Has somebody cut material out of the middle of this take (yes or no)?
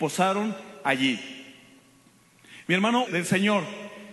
yes